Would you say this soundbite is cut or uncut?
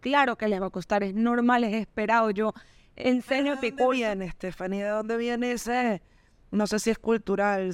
uncut